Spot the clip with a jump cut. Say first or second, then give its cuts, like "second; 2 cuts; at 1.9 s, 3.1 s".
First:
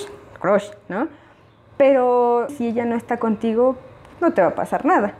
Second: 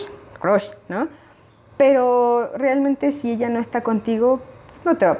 first; 1 cut; at 2.5 s